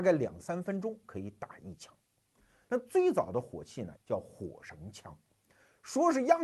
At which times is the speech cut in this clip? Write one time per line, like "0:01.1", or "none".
0:02.7
0:04.0